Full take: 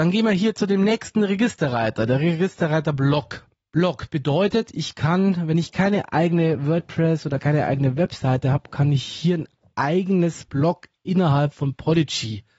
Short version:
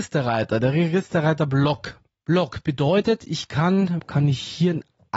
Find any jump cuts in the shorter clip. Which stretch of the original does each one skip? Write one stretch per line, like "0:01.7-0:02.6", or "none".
0:05.5-0:08.6

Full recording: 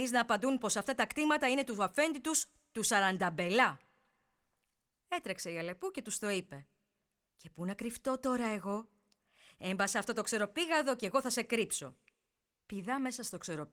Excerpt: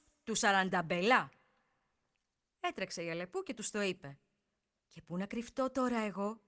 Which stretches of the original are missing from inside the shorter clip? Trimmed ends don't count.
none

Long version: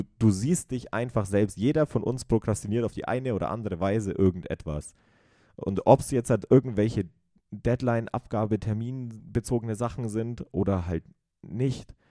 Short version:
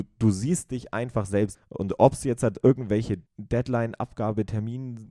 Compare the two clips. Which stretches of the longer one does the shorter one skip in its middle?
0:01.5-0:05.4
0:07.1-0:07.4

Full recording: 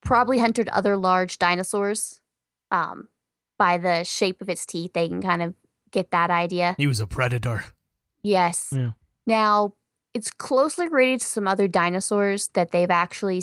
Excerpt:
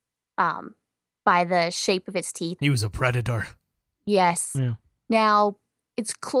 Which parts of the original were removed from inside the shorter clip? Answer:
0:04.9-0:06.8

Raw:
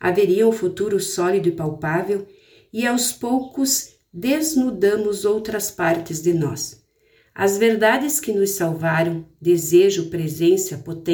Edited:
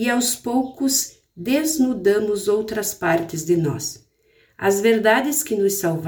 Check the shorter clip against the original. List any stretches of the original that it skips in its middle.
none

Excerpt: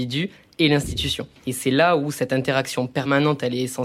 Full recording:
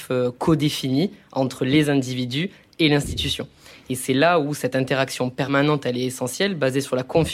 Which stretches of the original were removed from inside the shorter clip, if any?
0:03.6-0:03.8

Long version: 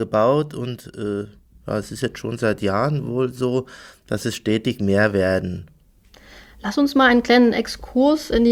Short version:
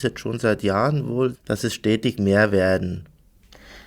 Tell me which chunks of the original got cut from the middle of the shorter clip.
0:03.3-0:04.0

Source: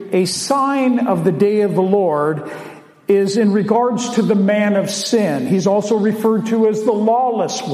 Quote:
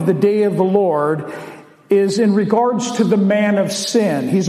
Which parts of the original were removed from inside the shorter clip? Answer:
none

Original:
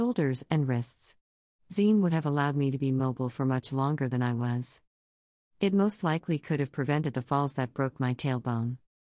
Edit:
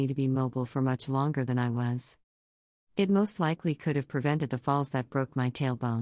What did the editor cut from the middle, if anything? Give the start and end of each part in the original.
none

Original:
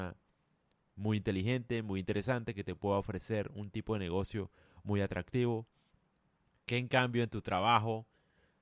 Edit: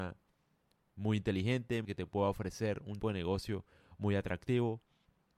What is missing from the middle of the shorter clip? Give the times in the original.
0:01.8-0:02.5
0:03.7-0:03.9

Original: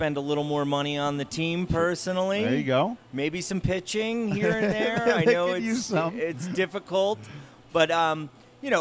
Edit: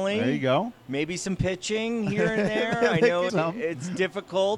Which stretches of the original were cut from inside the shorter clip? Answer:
0:05.5-0:05.9

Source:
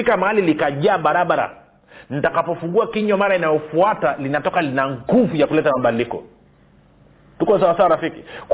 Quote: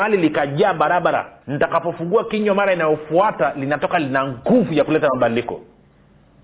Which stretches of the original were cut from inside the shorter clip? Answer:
0:01.7-0:02.0

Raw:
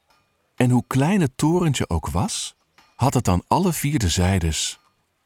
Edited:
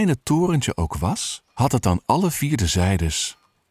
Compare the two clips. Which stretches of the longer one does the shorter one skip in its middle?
0:02.6-0:02.9

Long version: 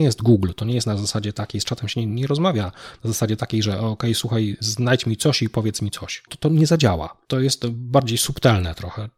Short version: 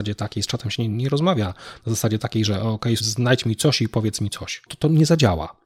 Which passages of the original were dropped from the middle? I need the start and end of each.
0:04.2-0:04.6

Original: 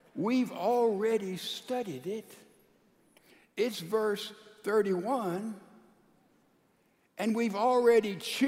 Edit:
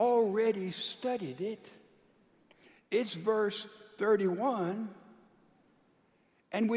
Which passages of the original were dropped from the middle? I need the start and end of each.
none

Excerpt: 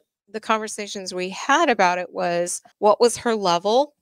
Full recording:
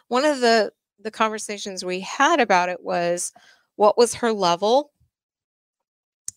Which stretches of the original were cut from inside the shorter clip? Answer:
0:03.4-0:03.7

